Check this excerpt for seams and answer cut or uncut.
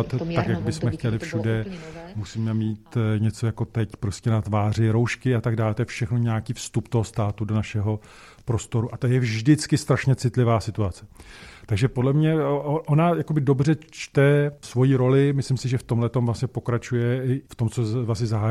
uncut